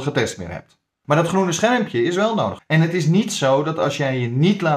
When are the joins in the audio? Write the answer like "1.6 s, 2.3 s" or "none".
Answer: 1.0 s, 2.6 s